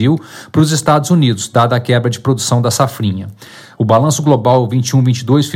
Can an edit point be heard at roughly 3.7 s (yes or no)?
yes